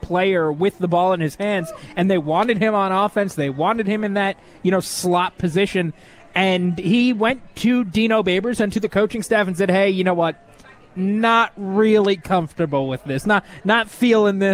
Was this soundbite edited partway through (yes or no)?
no